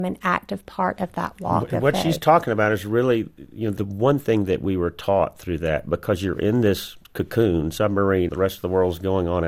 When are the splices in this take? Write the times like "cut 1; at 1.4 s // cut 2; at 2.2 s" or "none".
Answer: cut 1; at 7.0 s // cut 2; at 8.3 s